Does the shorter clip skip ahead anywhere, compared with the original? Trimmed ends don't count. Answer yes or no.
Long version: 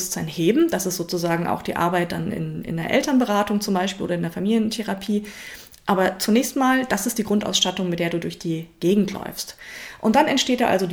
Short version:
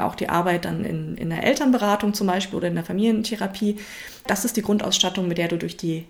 yes